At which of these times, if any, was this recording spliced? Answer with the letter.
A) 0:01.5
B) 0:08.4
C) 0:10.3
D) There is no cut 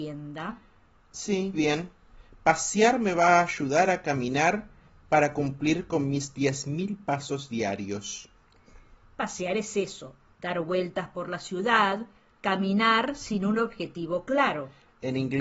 A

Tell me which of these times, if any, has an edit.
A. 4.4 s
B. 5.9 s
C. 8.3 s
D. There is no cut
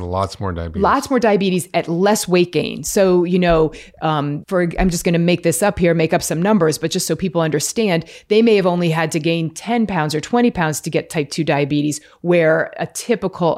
A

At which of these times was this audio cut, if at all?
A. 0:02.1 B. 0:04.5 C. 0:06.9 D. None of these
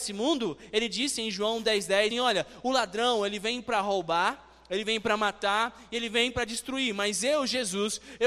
A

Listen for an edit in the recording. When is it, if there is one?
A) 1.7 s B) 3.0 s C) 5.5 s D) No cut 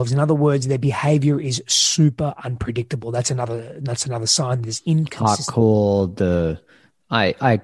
D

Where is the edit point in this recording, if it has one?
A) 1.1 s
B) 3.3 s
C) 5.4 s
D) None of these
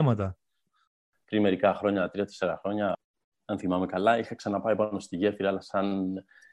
A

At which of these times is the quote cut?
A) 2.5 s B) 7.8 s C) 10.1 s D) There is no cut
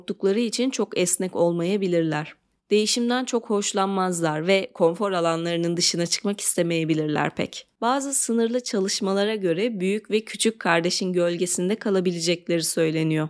B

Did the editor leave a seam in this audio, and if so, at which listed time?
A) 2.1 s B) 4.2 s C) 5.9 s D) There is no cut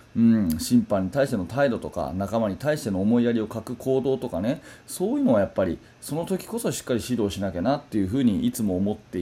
D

